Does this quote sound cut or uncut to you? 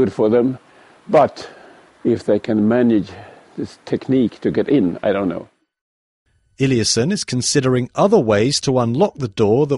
uncut